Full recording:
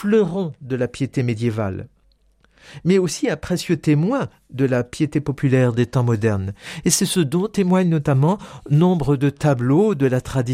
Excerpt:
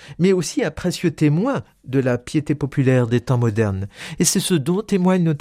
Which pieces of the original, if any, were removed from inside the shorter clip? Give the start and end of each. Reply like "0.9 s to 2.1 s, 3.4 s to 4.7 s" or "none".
none